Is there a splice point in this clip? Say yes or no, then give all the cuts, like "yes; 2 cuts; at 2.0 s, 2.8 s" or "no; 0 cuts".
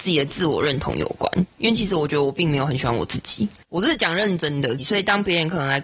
yes; 2 cuts; at 3.6 s, 4.8 s